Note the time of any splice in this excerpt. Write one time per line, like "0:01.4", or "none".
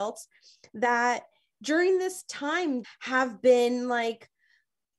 0:02.8